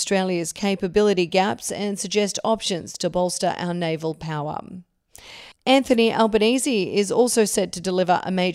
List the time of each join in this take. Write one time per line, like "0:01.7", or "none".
0:05.5